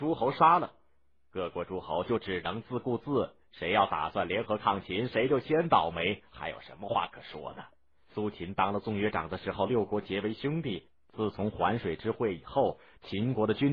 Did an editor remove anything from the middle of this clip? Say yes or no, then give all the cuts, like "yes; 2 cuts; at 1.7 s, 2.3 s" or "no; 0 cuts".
yes; 1 cut; at 8.0 s